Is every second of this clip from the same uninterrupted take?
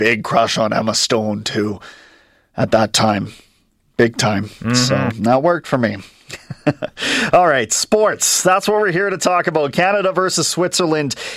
yes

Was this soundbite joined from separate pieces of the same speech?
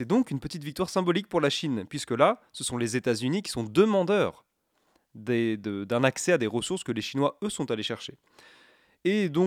no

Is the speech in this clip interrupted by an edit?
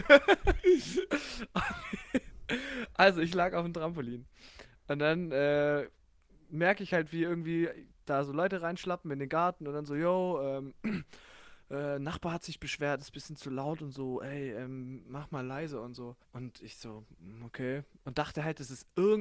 yes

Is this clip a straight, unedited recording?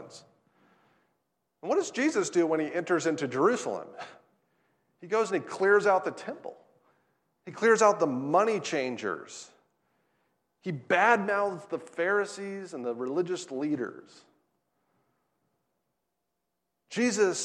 yes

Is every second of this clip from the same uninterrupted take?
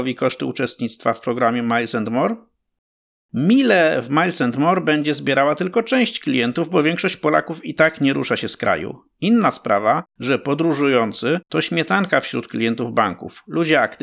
yes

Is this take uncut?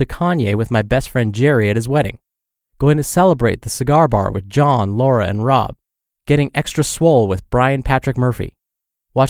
yes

